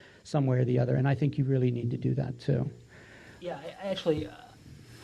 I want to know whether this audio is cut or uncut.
uncut